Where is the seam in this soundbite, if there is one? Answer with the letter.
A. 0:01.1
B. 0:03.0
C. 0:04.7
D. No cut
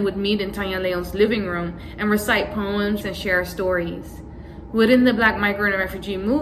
B